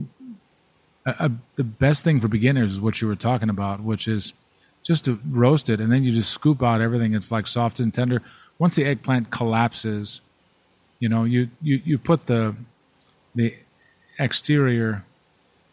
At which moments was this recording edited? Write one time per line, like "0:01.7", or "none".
none